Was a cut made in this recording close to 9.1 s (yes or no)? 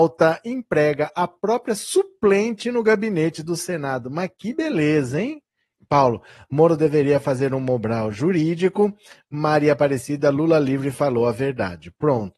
no